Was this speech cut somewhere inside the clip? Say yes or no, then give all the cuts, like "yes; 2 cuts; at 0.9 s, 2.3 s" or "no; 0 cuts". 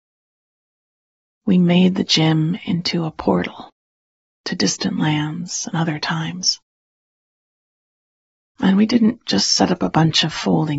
yes; 2 cuts; at 1.2 s, 8.6 s